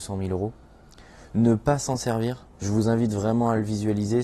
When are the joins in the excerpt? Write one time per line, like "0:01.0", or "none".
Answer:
0:02.5